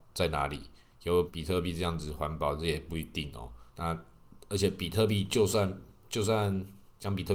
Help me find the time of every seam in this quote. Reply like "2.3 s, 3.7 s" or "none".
1.3 s, 3.7 s